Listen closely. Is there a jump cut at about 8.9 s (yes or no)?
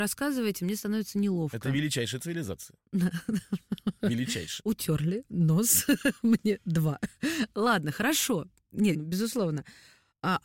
yes